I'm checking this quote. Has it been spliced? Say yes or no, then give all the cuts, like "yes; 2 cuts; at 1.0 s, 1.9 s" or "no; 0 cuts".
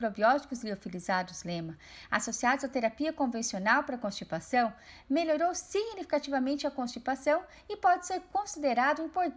no; 0 cuts